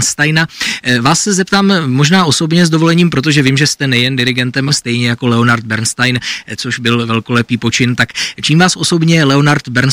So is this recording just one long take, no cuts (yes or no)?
no